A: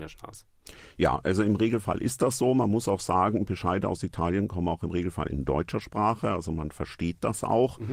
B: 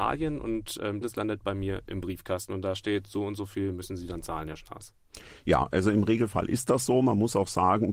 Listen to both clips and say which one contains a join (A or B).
B